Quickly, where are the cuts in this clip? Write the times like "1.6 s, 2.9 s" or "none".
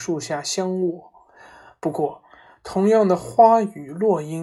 none